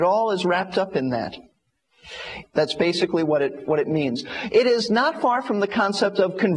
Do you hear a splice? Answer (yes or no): yes